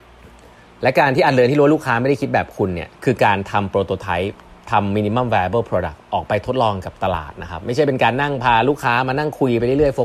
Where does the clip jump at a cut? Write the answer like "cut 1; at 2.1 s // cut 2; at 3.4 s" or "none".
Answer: cut 1; at 3.0 s